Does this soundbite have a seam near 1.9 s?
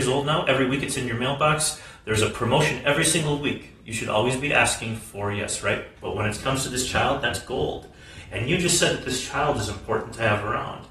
no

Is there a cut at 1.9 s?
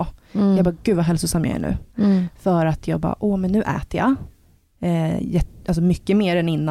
yes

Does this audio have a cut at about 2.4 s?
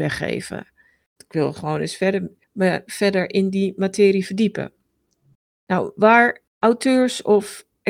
no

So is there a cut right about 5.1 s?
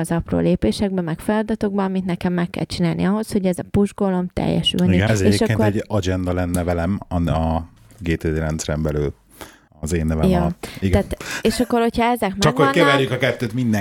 yes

